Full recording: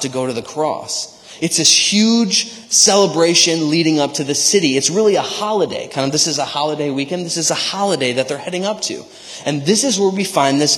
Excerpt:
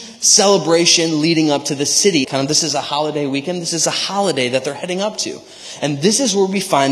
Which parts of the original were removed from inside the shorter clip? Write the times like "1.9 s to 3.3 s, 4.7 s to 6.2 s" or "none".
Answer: 4.7 s to 5.9 s